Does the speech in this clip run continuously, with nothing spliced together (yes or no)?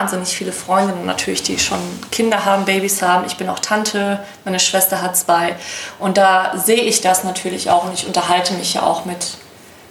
yes